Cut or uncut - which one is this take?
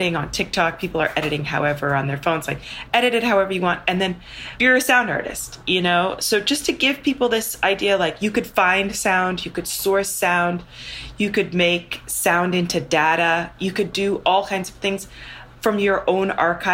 uncut